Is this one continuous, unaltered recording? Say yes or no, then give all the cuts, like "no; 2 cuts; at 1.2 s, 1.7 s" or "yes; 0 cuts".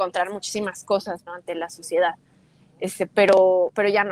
no; 1 cut; at 1.3 s